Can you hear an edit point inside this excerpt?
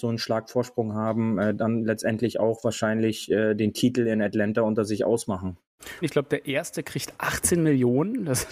yes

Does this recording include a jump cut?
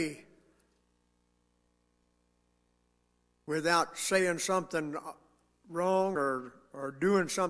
no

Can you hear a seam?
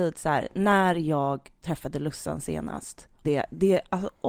yes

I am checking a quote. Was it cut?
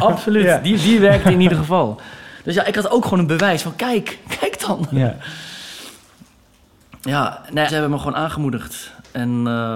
yes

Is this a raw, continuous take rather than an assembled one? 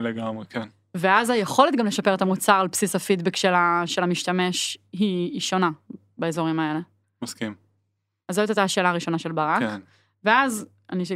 yes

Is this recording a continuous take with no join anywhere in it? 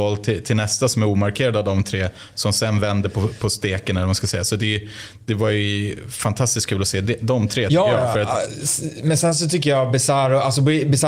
yes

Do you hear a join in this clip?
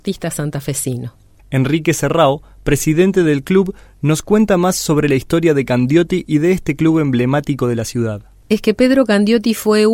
yes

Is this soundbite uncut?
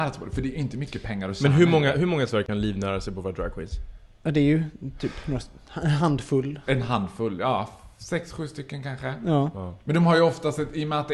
yes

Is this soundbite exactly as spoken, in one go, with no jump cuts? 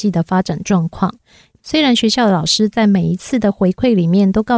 no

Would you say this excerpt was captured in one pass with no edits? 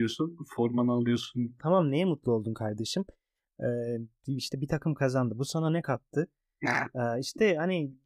no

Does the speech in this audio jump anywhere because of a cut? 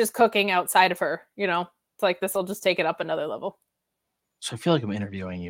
no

